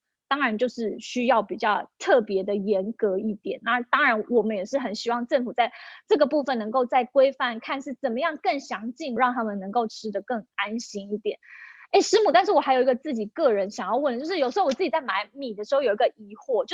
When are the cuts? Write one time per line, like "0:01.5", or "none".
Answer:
0:09.2